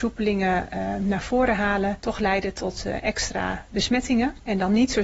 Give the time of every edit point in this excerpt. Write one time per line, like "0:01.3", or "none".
none